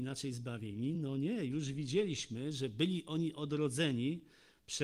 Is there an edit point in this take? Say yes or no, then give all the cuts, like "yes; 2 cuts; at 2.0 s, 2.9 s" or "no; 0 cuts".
no; 0 cuts